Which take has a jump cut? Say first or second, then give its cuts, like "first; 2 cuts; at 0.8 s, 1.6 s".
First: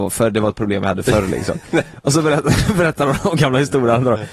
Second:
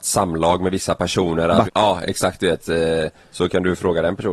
second; 2 cuts; at 1.7 s, 3.2 s